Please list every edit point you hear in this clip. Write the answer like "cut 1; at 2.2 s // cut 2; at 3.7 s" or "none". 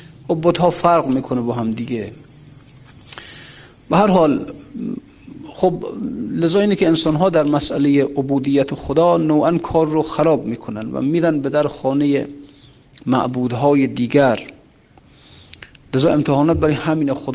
none